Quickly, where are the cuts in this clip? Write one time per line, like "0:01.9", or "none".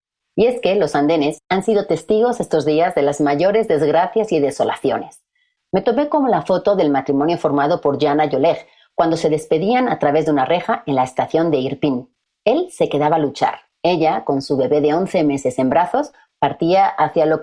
none